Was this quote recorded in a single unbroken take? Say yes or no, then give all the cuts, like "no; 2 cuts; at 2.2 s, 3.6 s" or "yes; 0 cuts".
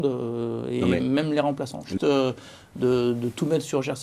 no; 1 cut; at 2.0 s